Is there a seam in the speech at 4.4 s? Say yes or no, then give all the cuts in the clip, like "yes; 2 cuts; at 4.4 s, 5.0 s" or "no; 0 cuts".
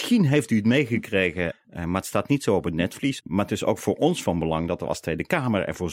no; 2 cuts; at 1.5 s, 3.2 s